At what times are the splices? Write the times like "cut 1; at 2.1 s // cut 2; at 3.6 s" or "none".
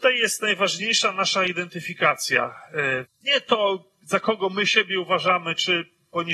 cut 1; at 3.1 s